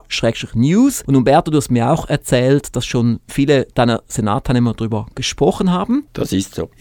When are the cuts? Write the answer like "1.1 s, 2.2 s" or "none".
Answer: none

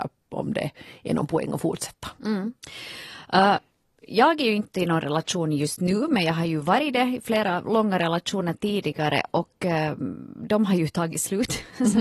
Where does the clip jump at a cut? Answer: none

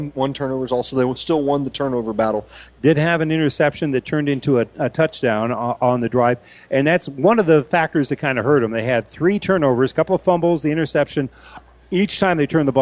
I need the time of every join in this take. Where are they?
2.7 s

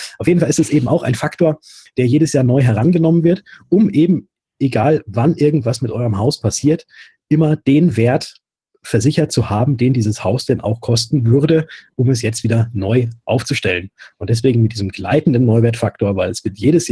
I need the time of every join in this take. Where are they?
none

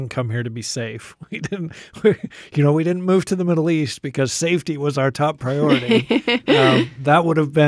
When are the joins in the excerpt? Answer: none

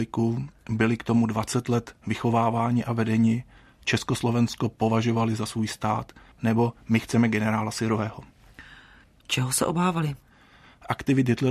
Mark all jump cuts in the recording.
6.3 s

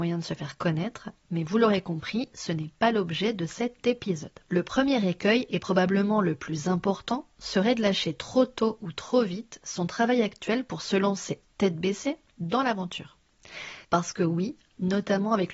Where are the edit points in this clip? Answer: 4.5 s, 13.8 s

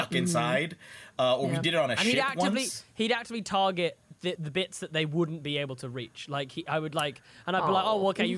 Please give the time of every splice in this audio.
4.4 s

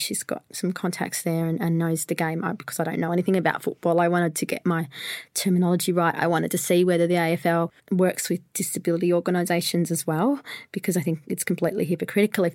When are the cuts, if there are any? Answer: 7.8 s

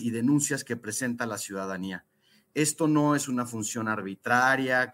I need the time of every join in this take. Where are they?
none

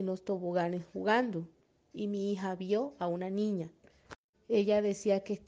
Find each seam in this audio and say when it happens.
4.3 s

